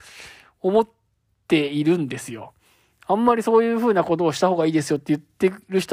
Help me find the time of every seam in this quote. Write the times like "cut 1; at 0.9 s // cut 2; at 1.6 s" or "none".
none